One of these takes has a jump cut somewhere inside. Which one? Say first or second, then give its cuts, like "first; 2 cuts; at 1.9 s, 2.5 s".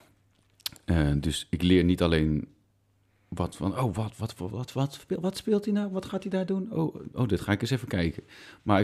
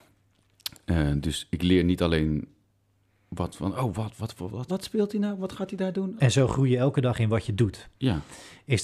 second; 2 cuts; at 4.7 s, 6.2 s